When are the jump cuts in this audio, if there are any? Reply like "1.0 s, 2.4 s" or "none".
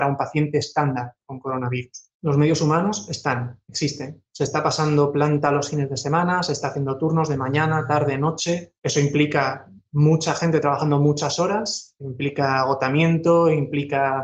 none